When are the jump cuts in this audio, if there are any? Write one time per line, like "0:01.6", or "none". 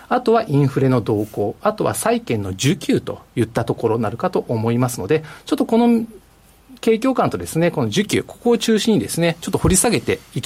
none

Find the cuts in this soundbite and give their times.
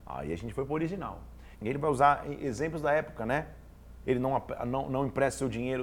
0:01.5
0:04.0

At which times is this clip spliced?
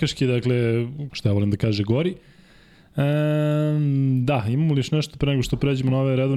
0:01.1

